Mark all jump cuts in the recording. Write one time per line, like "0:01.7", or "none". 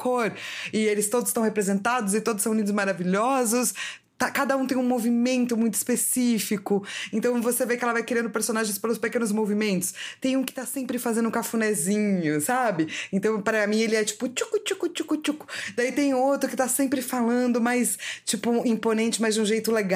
none